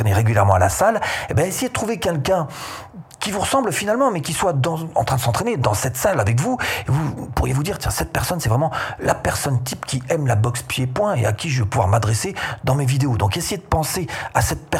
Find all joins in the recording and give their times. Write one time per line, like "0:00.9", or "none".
none

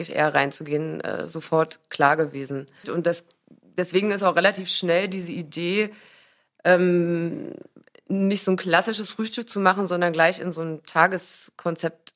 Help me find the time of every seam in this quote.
0:02.8

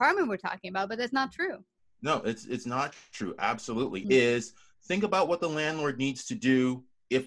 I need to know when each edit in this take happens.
0:04.0

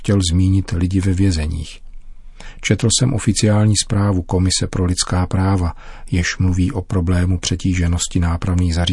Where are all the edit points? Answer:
none

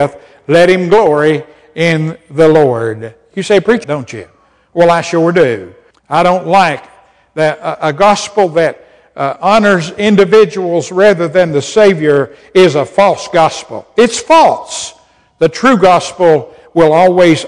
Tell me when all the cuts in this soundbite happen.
0:03.8
0:05.9

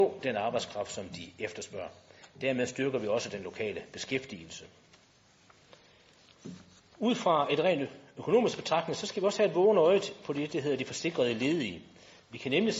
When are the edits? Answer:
none

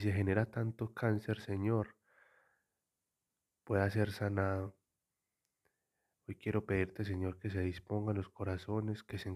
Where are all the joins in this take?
0:06.1

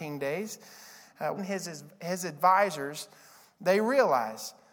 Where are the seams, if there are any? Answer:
0:01.4

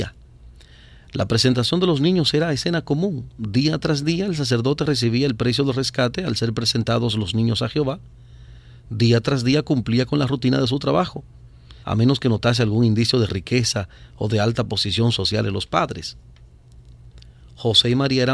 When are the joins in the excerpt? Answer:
0:11.8

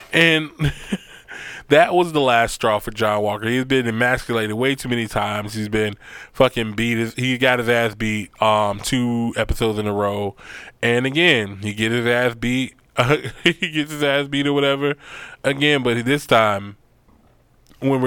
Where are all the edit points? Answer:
none

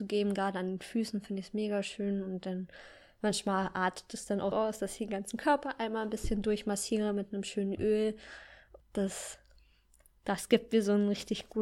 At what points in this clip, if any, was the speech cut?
0:04.5
0:08.8

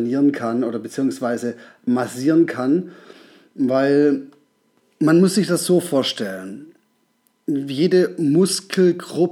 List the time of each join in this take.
none

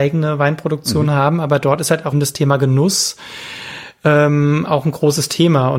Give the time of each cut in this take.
0:02.1

